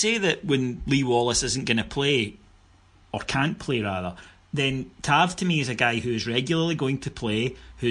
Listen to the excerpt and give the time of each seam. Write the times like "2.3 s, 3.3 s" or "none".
none

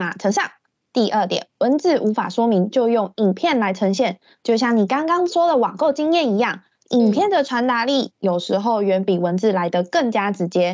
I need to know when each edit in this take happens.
none

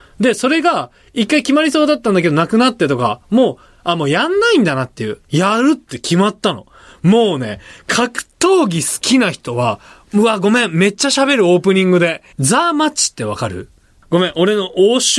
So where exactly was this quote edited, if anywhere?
5.2 s, 12.3 s

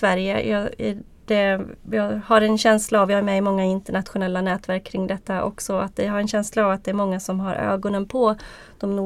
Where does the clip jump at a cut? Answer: none

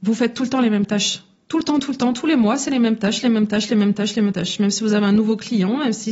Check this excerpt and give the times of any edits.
none

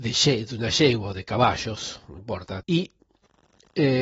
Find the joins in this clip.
2.6 s

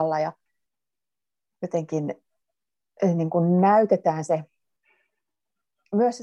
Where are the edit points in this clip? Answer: none

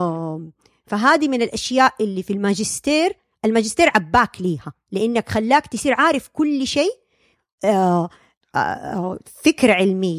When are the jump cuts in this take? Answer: none

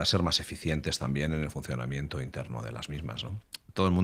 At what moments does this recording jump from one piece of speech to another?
none

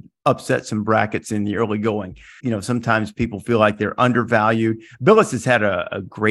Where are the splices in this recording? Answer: 2.4 s

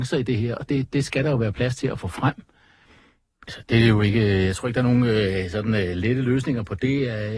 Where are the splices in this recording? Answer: 2.9 s

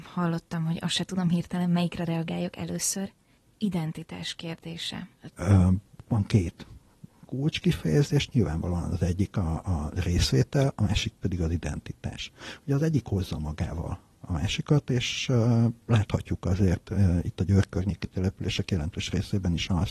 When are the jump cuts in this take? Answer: 5.3 s

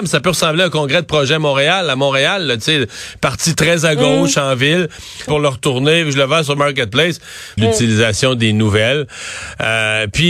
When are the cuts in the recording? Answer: 5.3 s, 7.6 s

